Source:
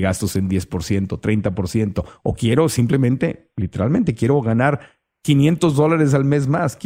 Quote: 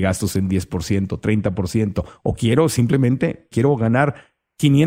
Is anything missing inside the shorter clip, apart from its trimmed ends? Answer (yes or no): yes